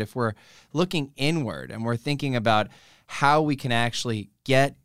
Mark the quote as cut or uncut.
uncut